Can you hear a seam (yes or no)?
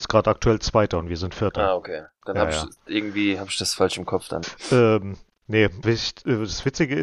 yes